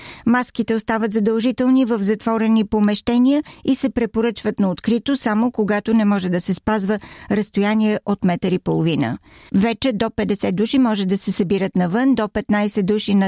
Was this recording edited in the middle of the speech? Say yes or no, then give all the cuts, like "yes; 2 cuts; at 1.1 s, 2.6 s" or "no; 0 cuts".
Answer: yes; 1 cut; at 9.5 s